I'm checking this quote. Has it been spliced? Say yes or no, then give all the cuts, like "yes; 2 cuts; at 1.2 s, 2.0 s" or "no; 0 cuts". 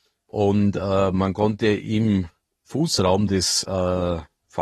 no; 0 cuts